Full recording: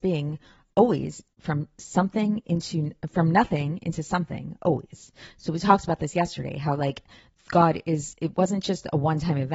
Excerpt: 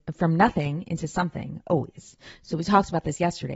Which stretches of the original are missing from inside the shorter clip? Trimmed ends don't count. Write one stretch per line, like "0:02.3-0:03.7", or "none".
none